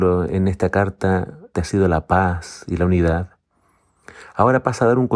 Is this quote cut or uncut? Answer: cut